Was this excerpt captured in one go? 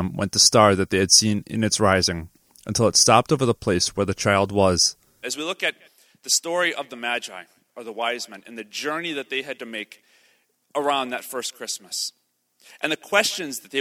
no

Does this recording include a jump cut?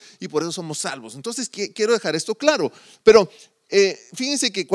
no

